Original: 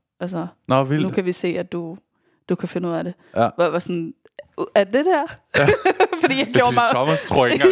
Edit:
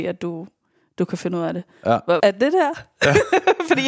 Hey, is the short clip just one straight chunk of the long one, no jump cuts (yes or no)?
no